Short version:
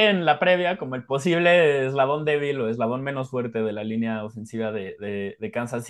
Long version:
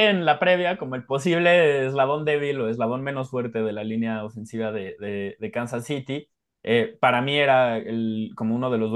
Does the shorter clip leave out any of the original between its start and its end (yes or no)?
no